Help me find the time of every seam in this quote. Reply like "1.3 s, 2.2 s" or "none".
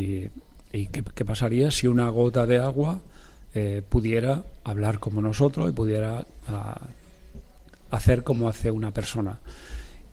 1.0 s